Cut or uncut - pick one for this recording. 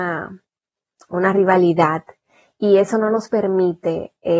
uncut